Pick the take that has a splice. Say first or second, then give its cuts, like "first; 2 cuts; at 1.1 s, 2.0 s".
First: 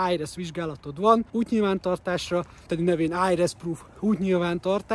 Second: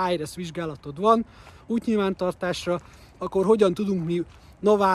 first; 2 cuts; at 1.3 s, 2.7 s